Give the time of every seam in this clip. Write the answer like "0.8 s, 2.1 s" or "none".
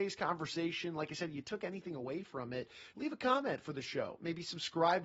2.9 s